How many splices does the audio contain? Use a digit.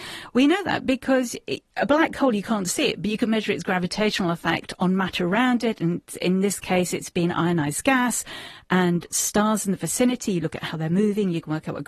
1